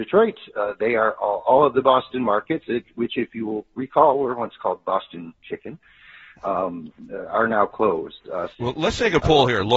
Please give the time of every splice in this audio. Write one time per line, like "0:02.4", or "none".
0:08.5